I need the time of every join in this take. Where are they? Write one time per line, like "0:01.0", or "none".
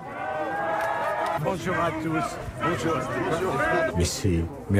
0:01.4
0:03.9